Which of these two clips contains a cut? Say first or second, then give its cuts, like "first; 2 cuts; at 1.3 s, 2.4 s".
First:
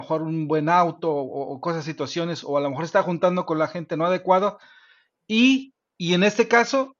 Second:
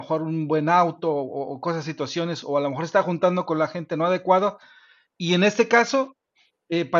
second; 1 cut; at 5.1 s